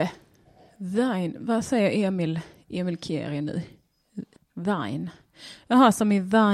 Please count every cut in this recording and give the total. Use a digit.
1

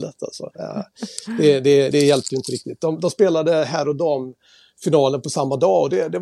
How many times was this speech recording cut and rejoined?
1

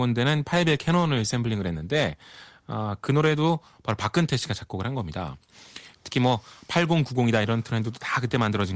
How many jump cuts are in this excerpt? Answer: 1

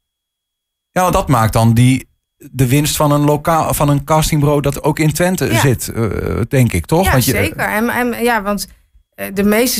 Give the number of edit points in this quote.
1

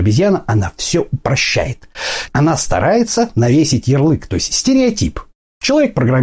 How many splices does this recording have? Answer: 1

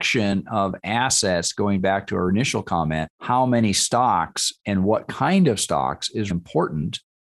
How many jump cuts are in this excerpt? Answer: 2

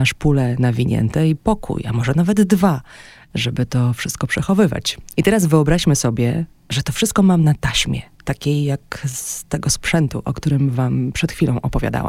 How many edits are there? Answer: 1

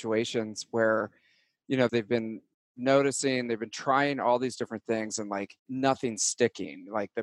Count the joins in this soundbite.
2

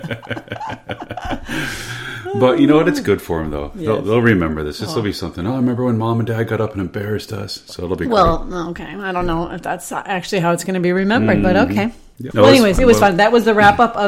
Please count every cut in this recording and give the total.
1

